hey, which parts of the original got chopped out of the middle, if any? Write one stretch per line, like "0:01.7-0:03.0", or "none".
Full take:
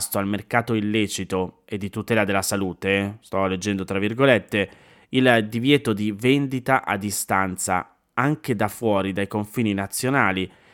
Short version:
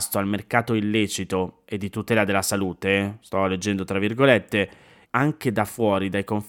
0:05.0-0:08.1